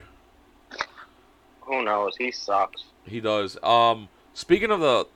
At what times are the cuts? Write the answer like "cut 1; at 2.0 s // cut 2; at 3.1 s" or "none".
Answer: none